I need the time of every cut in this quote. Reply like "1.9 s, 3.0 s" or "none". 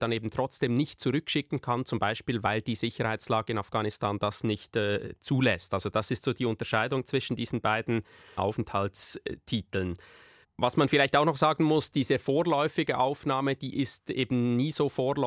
none